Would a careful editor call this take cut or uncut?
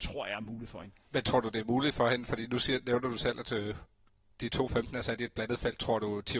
uncut